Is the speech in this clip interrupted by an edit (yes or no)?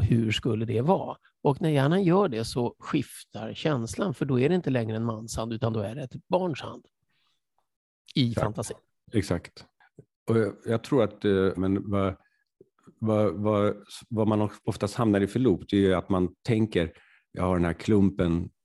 yes